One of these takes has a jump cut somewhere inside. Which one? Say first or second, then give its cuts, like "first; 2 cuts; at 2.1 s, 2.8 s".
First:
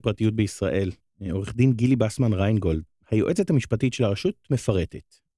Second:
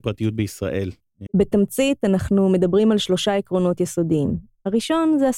second; 1 cut; at 1.3 s